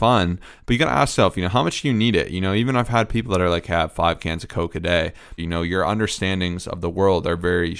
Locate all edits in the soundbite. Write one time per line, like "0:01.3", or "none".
0:05.4